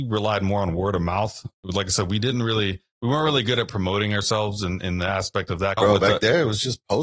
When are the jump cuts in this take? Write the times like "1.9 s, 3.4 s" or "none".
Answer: 5.8 s